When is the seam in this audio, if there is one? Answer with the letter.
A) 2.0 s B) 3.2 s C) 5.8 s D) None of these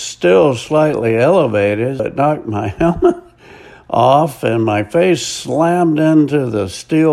A